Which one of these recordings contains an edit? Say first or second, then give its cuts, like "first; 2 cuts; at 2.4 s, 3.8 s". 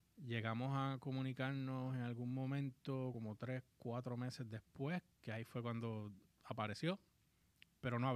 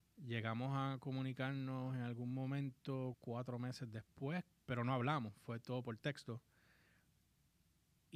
second; 2 cuts; at 3.1 s, 4.5 s